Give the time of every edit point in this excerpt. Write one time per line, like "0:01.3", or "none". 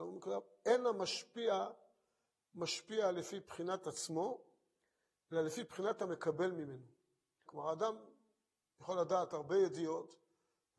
0:07.5

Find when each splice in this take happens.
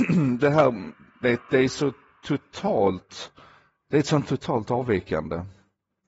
0:01.2

